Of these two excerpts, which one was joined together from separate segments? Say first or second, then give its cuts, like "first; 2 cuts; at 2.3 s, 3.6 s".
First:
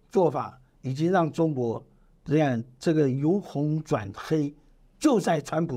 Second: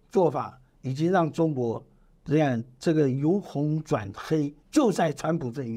second; 1 cut; at 4.6 s